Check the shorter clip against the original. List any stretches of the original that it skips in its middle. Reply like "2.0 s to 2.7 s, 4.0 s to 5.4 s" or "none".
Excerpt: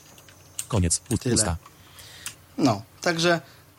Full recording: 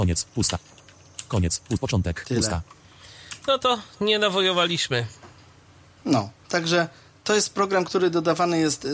1.8 s to 2.2 s, 3.4 s to 5.8 s